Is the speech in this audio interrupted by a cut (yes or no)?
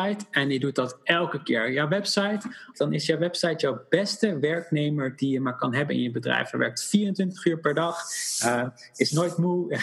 yes